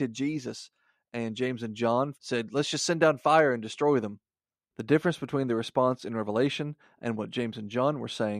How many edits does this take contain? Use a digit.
2